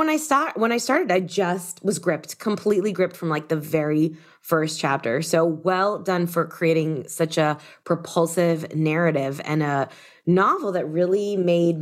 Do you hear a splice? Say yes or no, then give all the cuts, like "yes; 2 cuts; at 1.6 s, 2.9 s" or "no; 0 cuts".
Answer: no; 0 cuts